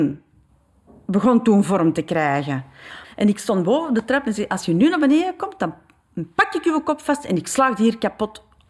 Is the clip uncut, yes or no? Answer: no